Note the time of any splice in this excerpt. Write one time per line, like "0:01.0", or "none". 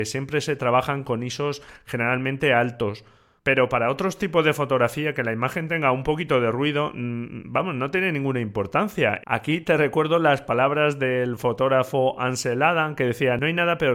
0:09.2

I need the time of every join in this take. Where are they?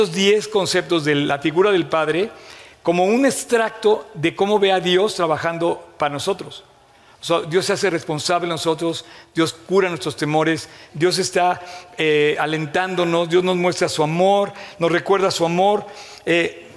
0:10.9

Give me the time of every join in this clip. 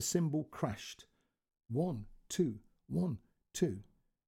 none

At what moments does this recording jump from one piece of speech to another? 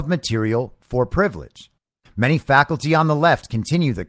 0:02.1

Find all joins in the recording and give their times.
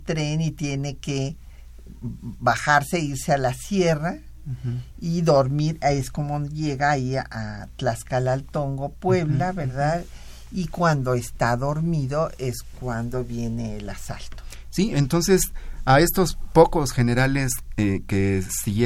none

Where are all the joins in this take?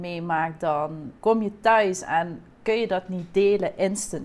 0:01.2

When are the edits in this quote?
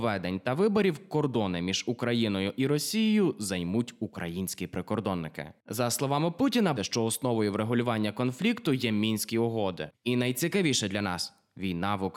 0:06.8
0:09.9

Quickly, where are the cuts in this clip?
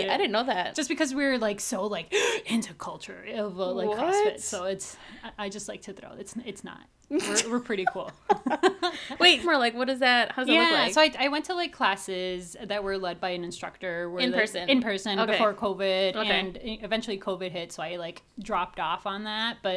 0:09.4

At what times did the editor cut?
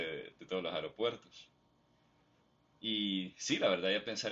none

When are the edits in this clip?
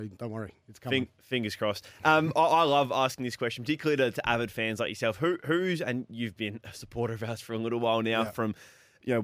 none

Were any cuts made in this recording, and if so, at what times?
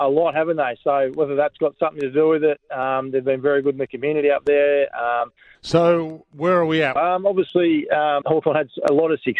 0:05.5
0:07.0
0:08.2

